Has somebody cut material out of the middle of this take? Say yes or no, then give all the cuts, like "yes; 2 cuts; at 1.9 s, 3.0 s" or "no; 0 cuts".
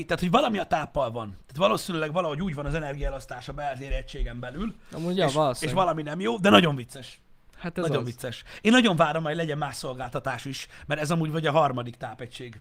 no; 0 cuts